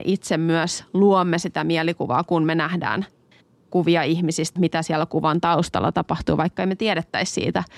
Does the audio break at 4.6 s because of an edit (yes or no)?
yes